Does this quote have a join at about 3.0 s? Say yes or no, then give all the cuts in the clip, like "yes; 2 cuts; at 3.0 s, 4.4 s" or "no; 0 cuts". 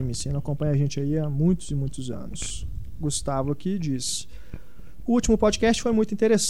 no; 0 cuts